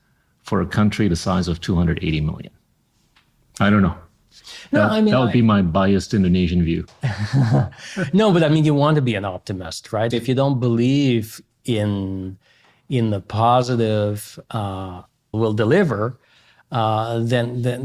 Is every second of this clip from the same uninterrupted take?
no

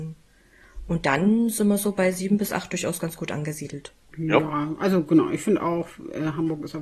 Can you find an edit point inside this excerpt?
no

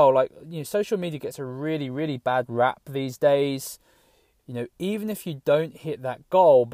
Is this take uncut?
no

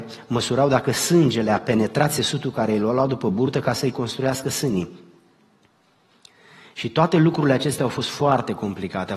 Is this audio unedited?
yes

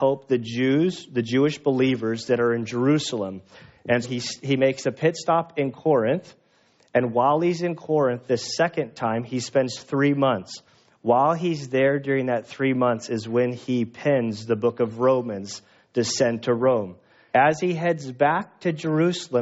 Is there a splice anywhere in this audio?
yes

